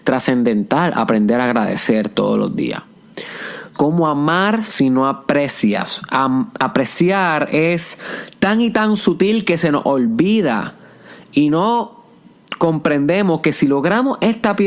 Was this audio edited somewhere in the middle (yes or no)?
yes